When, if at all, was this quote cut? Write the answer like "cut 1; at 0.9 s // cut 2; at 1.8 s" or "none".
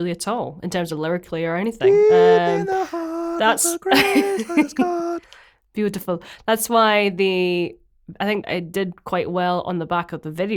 cut 1; at 8.4 s